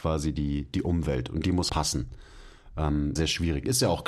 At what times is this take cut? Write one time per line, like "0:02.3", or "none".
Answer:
0:01.7
0:03.2